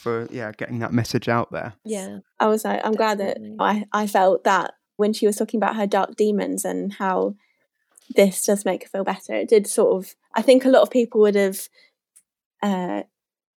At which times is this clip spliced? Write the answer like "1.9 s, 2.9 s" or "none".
1.8 s, 3.6 s, 5.0 s

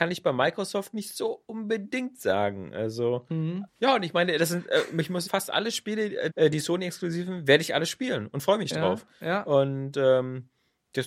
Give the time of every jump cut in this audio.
3.7 s, 5.3 s, 6.3 s

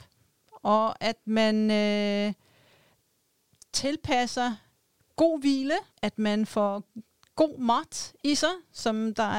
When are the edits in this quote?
5.9 s

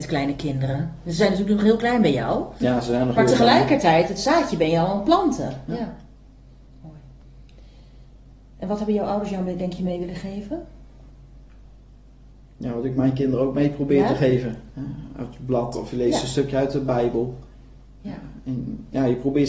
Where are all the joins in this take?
5.7 s, 14.7 s

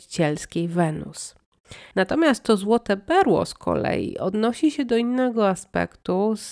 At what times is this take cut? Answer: 1.9 s

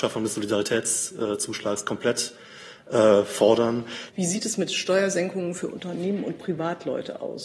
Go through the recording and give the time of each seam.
4.1 s

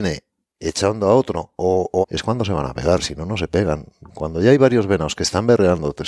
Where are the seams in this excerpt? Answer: 2.0 s, 4.1 s

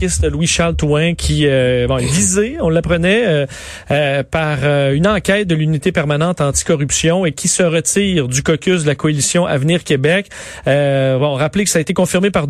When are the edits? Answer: none

